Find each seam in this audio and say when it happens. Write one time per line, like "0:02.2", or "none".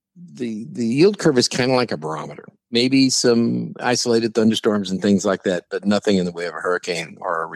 0:02.6